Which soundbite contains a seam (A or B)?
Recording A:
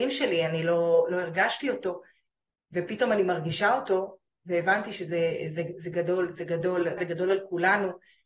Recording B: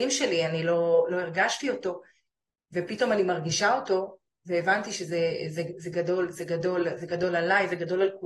A